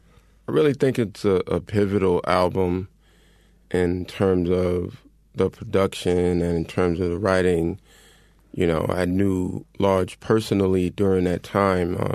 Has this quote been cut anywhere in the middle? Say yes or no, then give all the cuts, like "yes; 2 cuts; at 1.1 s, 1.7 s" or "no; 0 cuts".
no; 0 cuts